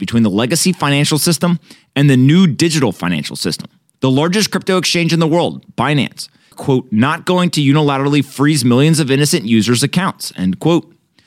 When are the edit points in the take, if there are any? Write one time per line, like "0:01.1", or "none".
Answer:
0:03.9
0:06.5